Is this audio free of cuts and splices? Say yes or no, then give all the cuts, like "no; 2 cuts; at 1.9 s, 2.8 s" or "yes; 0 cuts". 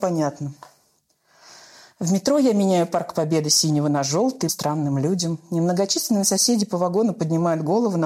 no; 1 cut; at 4.5 s